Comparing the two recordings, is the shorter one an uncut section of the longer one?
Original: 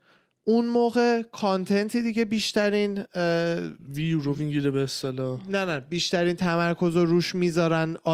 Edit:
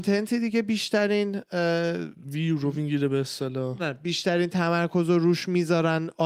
no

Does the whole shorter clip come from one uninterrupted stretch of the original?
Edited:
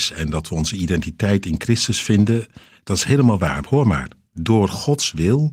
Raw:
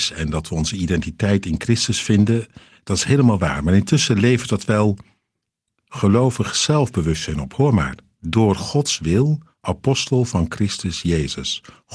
no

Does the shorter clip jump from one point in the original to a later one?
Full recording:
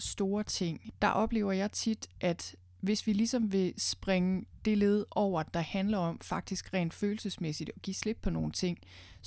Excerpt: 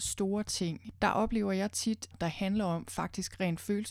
yes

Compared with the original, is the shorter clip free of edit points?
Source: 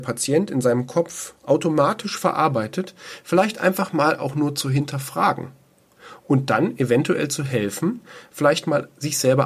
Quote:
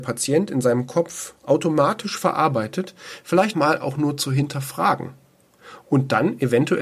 no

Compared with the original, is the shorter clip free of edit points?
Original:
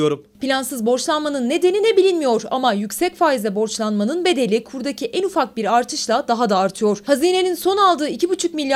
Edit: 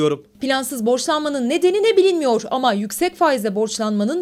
yes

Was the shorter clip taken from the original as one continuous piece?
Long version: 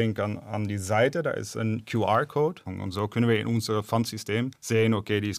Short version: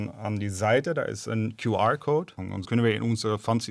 no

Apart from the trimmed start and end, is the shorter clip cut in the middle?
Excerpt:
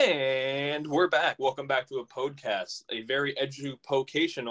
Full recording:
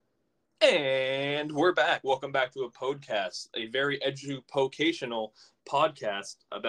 no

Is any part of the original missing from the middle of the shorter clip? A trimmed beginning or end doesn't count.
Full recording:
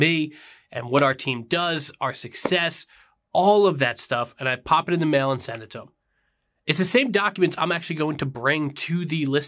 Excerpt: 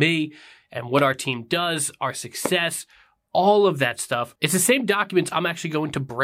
yes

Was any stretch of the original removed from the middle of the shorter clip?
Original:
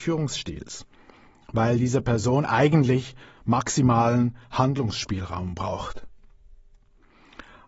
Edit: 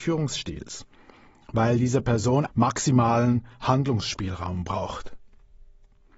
yes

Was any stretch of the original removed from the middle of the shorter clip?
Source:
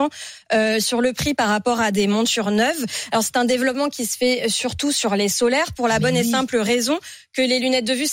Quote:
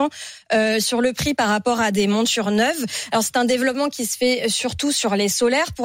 no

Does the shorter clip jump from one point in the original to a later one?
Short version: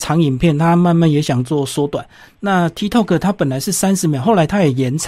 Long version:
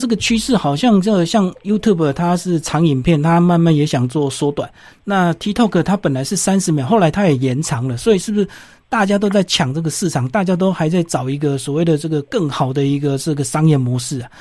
no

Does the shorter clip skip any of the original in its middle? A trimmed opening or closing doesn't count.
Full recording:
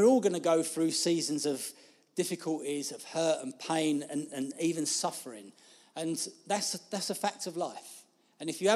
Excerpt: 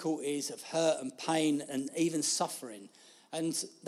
yes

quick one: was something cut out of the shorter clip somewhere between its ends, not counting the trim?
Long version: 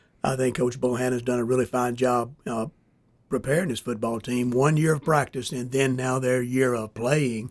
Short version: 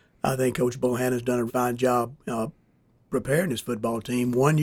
yes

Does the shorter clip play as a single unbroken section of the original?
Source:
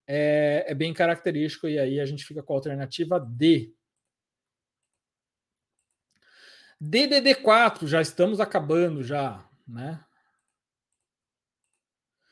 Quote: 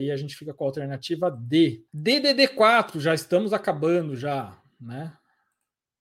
no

